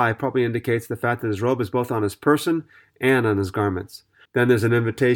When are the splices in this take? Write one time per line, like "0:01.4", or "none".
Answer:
0:04.3